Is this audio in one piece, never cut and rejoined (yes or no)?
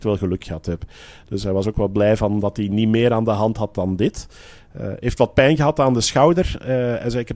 yes